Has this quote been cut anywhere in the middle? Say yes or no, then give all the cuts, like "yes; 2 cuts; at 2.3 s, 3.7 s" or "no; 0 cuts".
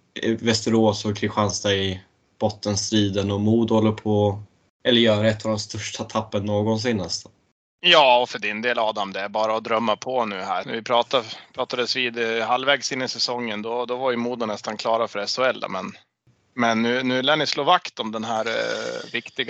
yes; 2 cuts; at 10.6 s, 15.6 s